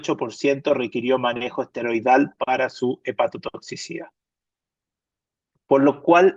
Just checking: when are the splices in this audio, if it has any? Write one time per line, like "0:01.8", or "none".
none